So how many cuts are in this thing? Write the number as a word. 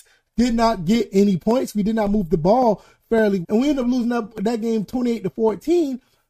one